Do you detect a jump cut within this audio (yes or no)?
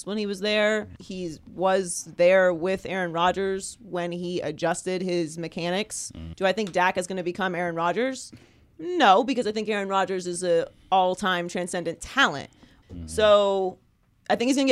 yes